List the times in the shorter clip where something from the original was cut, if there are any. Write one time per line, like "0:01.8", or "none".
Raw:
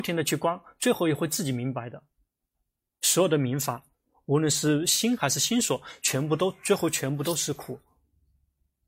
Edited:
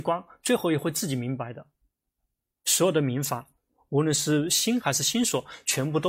none